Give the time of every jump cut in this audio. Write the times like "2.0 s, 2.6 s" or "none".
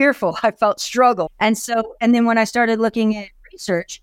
1.3 s

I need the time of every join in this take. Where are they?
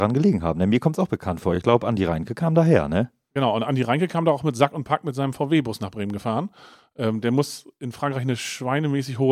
none

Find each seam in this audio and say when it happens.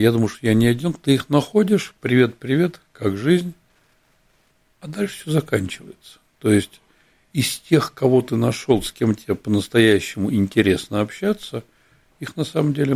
none

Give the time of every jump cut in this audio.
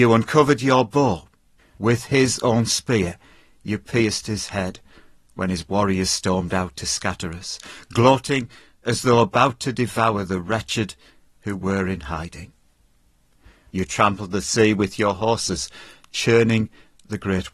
1.6 s

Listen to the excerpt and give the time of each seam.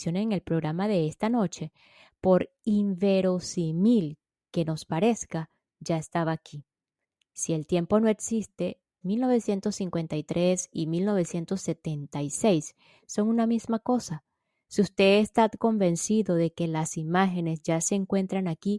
9.0 s

